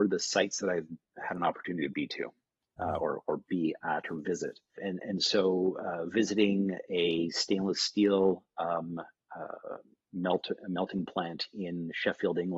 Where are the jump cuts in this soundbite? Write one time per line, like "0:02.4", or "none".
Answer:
0:04.8